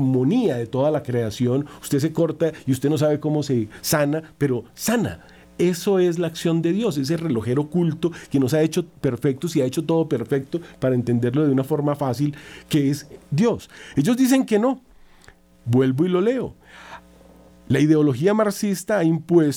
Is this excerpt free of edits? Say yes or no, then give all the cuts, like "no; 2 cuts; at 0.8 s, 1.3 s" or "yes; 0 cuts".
yes; 0 cuts